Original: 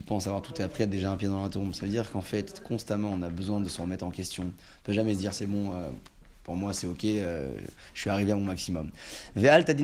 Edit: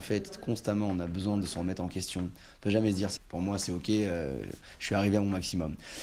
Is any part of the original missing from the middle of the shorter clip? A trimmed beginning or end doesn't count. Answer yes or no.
yes